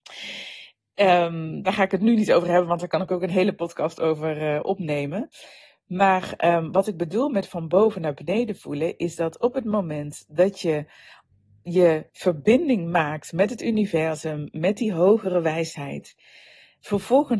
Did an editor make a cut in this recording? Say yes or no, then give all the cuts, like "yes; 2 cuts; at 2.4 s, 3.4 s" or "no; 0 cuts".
yes; 1 cut; at 12.1 s